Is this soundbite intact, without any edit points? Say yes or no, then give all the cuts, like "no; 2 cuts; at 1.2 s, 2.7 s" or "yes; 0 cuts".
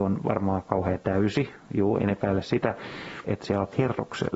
no; 2 cuts; at 2.0 s, 3.2 s